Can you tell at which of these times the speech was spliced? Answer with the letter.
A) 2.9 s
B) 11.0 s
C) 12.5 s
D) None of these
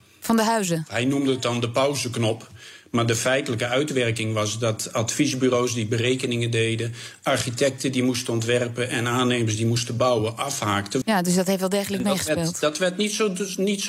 B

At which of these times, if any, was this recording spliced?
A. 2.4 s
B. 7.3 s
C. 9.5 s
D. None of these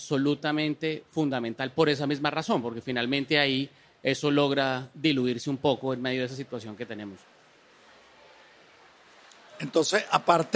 D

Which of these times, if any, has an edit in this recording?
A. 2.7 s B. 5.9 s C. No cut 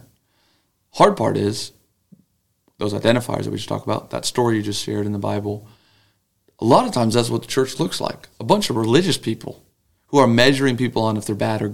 C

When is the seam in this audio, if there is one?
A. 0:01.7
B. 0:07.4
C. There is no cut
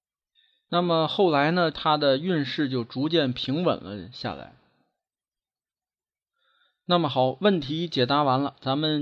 A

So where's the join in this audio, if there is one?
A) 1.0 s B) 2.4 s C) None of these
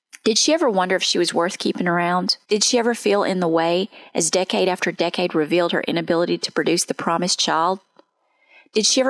B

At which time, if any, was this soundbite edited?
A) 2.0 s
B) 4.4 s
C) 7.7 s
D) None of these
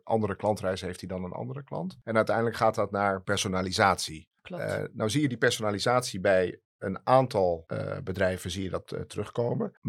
B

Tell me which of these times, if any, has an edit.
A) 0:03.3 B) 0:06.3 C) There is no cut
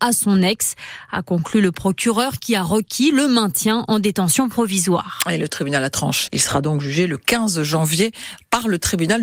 B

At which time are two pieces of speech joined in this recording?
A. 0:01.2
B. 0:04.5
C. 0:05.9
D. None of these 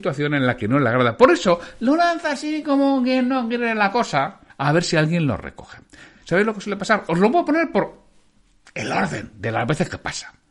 B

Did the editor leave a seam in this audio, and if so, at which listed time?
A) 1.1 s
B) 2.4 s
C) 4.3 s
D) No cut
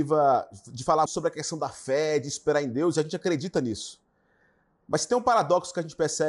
A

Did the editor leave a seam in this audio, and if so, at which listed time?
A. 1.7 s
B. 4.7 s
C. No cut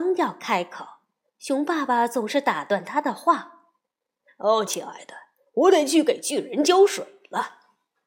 B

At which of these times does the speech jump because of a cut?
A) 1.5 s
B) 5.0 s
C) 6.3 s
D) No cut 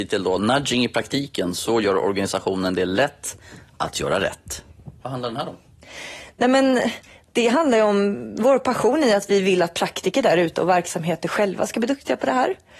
B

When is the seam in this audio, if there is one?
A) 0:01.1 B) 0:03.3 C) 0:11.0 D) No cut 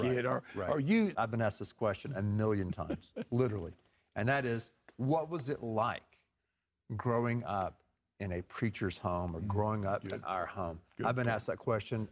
A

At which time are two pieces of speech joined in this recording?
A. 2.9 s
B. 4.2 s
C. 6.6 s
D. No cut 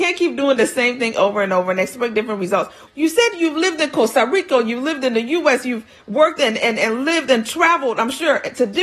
A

